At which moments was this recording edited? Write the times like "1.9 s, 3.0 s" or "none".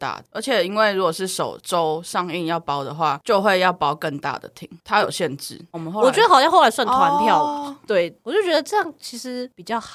5.7 s, 7.8 s